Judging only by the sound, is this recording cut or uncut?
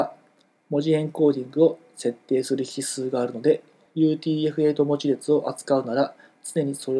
uncut